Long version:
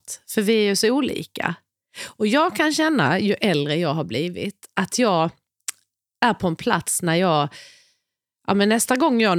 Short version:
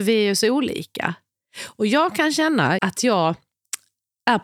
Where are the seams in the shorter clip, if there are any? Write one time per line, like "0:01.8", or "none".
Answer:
0:02.8